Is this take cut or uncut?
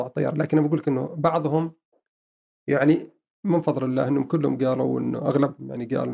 uncut